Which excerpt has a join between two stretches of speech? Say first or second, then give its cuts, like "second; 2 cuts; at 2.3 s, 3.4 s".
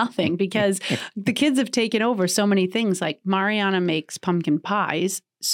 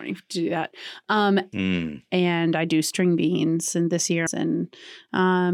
second; 2 cuts; at 1.5 s, 4.3 s